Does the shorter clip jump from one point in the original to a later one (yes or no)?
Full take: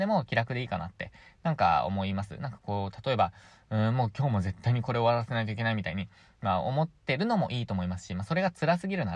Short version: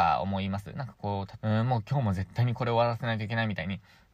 yes